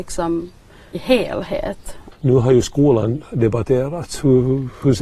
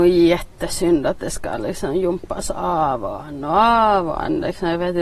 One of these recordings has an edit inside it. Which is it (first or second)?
first